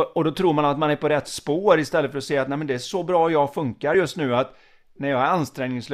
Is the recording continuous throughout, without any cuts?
yes; 0 cuts

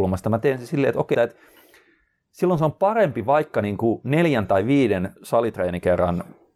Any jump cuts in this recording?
yes; 1 cut; at 1.1 s

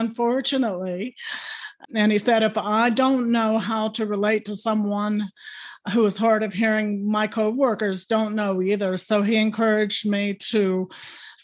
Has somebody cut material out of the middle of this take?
yes; 1 cut; at 1.8 s

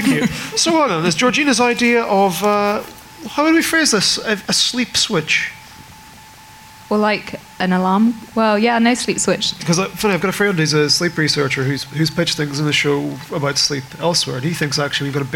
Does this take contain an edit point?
yes; 1 cut; at 9.6 s

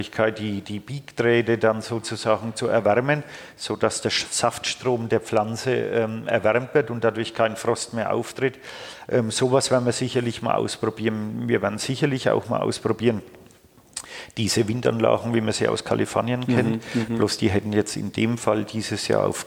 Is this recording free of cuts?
yes; 0 cuts

